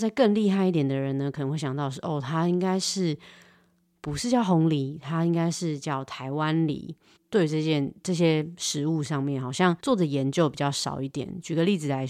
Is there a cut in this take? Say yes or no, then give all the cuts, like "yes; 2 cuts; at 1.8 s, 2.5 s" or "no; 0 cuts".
yes; 2 cuts; at 7.2 s, 9.8 s